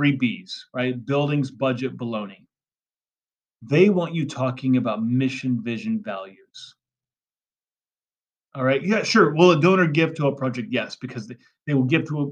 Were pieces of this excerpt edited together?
no; 0 cuts

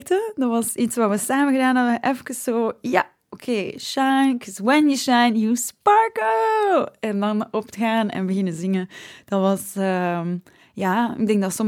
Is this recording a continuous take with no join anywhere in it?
yes; 0 cuts

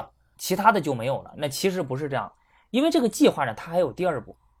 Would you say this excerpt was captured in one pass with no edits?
yes; 0 cuts

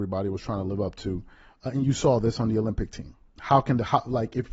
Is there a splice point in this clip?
yes; 1 cut; at 3.3 s

